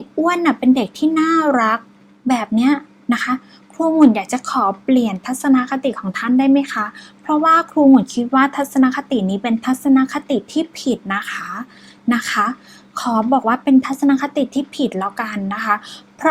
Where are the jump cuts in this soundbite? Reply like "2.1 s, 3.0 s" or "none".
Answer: none